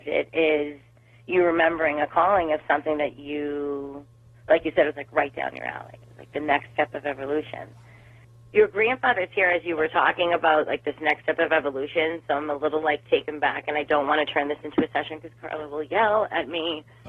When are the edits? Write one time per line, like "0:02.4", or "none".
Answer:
none